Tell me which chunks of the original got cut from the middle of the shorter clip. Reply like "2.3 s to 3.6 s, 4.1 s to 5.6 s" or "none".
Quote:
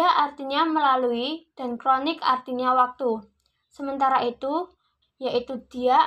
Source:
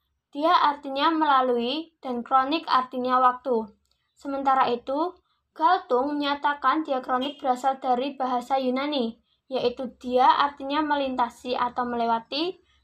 5.5 s to 9.3 s